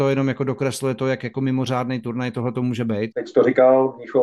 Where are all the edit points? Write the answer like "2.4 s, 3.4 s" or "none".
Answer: 3.1 s

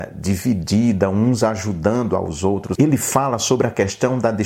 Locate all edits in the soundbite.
2.8 s

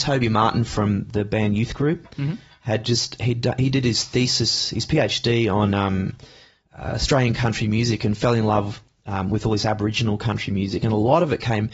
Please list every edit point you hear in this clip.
none

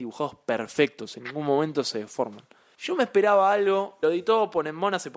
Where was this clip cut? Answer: 2.7 s, 4.0 s

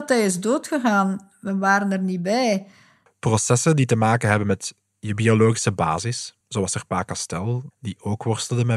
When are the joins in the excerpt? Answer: 3.1 s, 6.4 s, 7.7 s

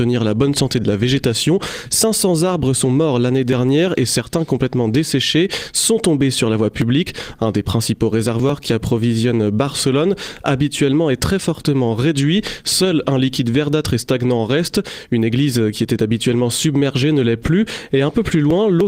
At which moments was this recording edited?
7.4 s

